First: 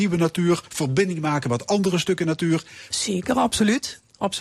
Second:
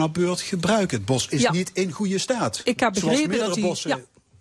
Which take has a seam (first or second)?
first